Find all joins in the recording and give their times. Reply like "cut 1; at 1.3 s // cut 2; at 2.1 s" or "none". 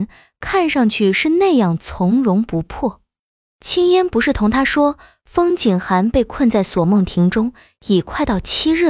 cut 1; at 3.5 s